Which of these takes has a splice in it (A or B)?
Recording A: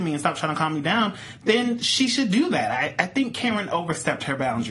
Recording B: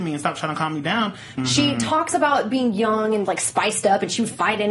B